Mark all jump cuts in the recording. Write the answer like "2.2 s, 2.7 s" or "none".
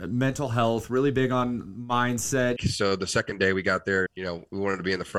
2.6 s, 4.1 s